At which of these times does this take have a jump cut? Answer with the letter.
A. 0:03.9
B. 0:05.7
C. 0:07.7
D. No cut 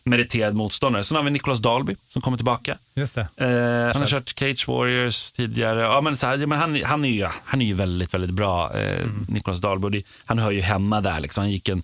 A